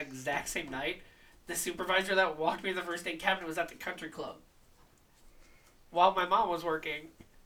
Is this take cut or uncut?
uncut